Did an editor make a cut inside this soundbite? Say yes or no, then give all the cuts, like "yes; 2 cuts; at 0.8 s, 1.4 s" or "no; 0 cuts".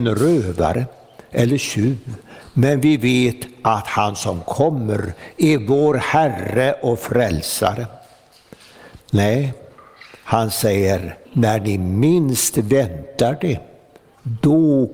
yes; 2 cuts; at 9.0 s, 11.2 s